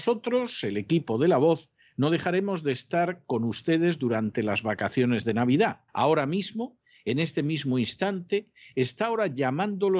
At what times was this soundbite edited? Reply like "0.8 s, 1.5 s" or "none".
5.9 s